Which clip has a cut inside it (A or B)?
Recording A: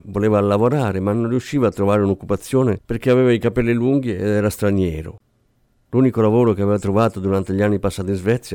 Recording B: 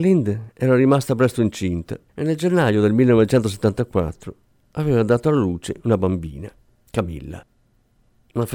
B